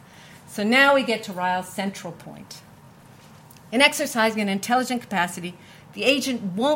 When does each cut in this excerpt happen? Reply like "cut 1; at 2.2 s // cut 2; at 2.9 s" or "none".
none